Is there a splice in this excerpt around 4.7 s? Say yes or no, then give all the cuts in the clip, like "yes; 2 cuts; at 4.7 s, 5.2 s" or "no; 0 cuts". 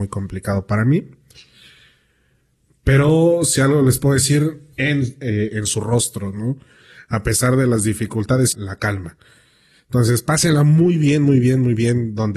yes; 2 cuts; at 4.7 s, 8.5 s